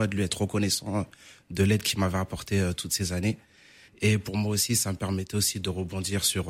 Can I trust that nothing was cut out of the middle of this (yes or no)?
yes